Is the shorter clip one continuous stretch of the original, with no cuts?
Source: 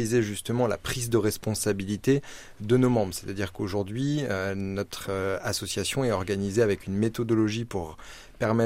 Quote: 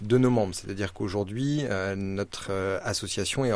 yes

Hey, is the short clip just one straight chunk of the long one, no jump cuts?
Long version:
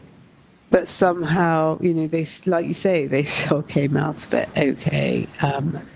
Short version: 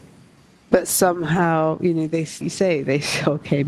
no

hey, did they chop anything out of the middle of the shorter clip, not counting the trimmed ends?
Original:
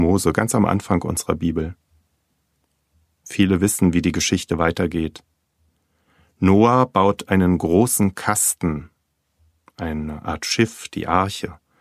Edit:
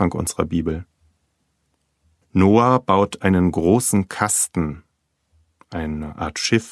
yes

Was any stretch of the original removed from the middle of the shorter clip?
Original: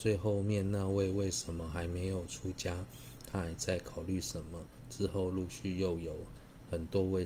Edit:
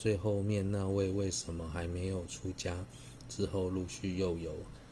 yes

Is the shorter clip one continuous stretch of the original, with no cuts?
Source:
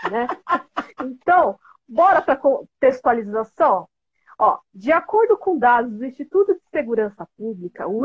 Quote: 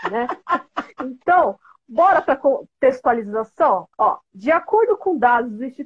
no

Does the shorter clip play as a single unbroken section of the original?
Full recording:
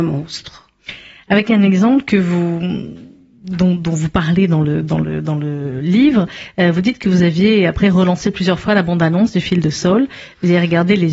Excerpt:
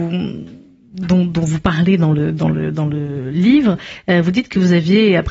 yes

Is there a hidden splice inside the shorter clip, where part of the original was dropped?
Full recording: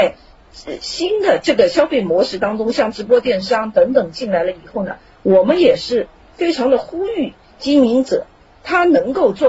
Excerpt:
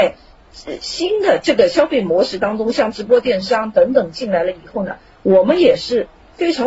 no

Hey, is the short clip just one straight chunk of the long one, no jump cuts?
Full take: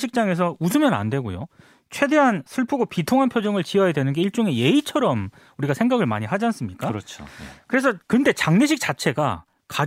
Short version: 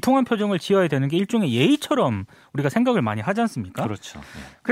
yes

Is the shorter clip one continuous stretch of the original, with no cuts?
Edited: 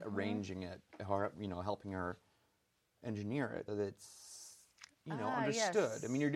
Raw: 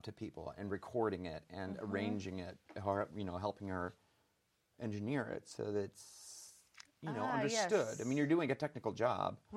no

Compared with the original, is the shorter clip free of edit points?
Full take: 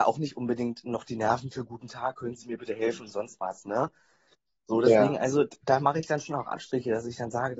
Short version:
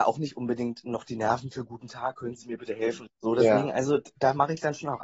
no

